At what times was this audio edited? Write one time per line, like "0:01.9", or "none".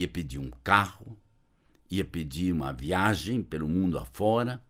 none